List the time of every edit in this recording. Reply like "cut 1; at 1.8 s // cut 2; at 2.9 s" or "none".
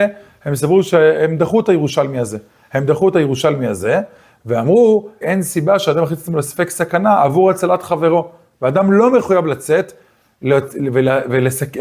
cut 1; at 5.2 s

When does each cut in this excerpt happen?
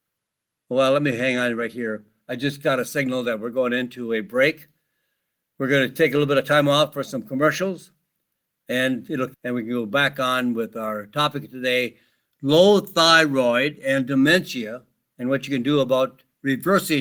cut 1; at 9.3 s

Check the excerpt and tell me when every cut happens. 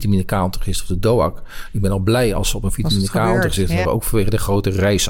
cut 1; at 3.8 s

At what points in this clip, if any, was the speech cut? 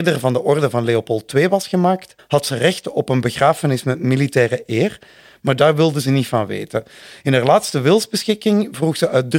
cut 1; at 2.2 s

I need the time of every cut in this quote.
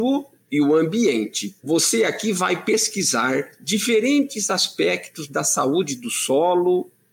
cut 1; at 1.6 s

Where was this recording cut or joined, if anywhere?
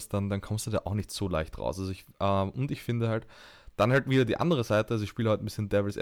none

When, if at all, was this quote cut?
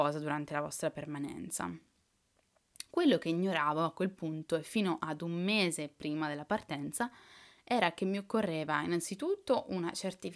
none

